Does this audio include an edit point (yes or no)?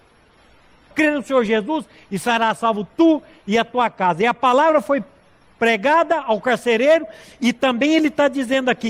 yes